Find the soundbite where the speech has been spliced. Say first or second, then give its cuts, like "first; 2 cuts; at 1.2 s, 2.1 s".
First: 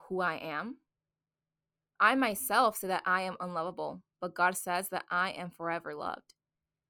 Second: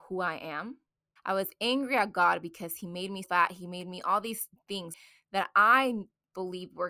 second; 2 cuts; at 1.2 s, 3.2 s